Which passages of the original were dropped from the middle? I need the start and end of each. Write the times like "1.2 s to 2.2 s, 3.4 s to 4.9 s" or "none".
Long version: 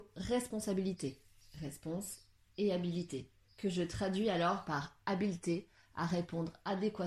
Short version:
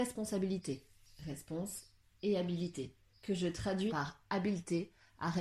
4.2 s to 4.6 s